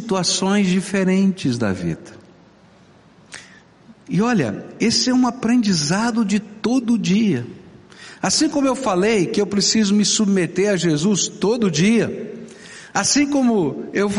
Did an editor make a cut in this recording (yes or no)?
no